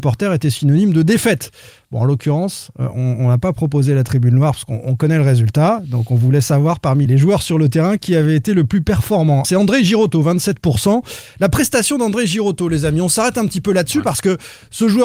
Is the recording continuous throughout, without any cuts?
no; 2 cuts; at 7.1 s, 9.4 s

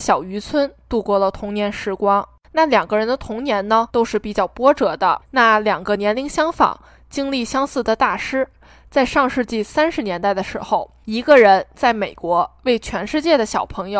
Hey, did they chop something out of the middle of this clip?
yes; 1 cut; at 5.2 s

